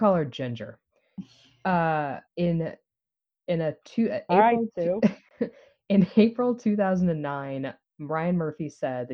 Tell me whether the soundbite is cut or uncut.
cut